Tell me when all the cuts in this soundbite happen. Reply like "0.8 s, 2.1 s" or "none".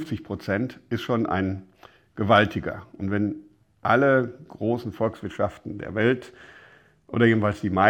none

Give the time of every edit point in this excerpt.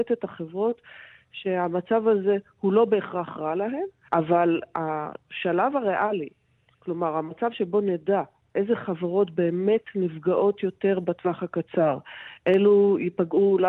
4.1 s

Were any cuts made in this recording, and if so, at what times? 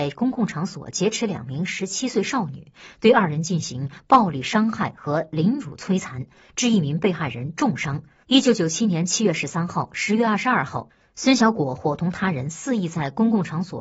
8.2 s

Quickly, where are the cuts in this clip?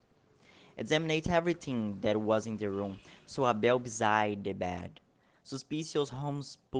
5.3 s

